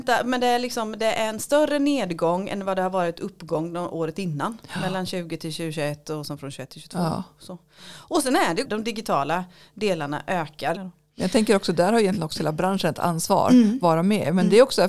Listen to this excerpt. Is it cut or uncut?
cut